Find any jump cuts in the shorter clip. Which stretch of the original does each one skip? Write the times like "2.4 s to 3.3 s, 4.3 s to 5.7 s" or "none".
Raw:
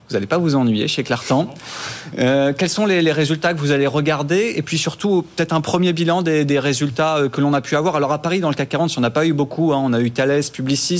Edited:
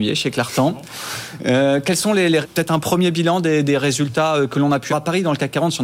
3.1 s to 5.2 s, 7.7 s to 8.1 s